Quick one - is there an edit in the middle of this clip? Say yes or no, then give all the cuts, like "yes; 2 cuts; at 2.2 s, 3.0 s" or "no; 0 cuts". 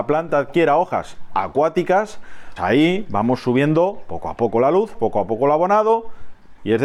yes; 2 cuts; at 2.6 s, 4.9 s